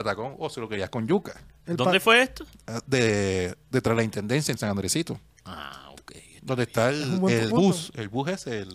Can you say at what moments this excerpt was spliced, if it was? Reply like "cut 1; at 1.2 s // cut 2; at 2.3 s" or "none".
cut 1; at 7.5 s